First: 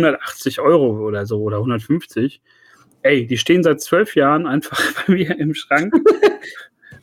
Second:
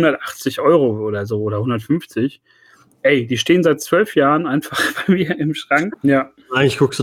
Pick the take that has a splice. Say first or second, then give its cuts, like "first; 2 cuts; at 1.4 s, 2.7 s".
second; 1 cut; at 5.9 s